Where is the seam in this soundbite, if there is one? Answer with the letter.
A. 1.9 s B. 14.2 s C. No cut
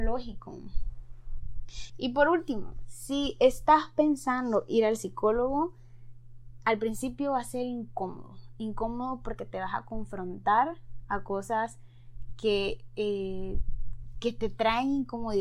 A